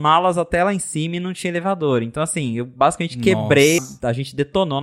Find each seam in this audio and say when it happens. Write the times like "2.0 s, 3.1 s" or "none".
3.8 s